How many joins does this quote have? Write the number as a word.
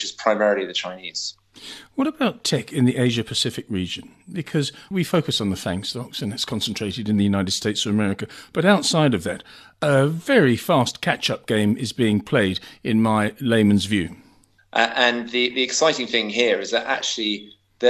one